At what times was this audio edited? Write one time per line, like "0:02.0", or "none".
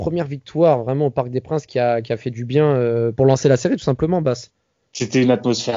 0:03.1